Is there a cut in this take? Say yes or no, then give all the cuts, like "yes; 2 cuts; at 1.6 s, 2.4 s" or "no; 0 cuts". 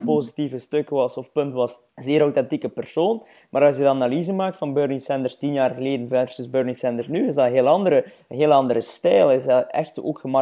yes; 1 cut; at 1.9 s